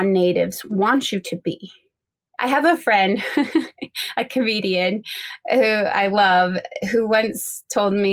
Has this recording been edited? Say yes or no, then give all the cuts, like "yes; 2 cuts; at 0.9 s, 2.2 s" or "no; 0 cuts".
no; 0 cuts